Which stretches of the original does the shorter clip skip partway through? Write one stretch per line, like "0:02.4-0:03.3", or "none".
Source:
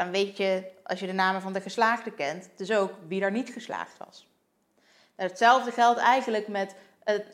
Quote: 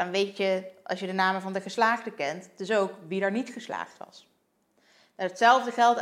none